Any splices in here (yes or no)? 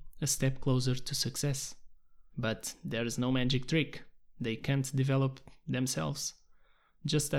yes